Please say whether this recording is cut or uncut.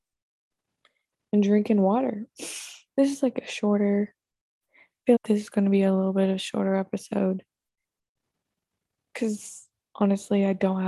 cut